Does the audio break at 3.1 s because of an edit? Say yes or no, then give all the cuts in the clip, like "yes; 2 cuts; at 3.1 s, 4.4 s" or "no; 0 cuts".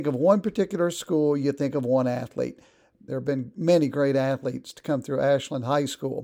yes; 1 cut; at 3.1 s